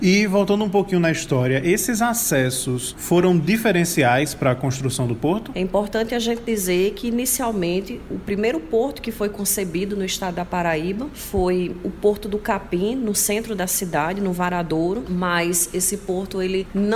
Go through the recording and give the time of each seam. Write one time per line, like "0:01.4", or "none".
0:05.5